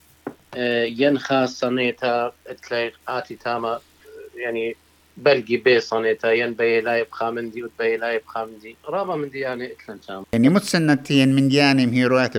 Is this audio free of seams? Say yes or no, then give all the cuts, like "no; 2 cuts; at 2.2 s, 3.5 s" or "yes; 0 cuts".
no; 2 cuts; at 8.8 s, 10.2 s